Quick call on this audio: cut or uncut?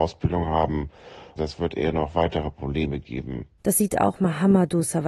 uncut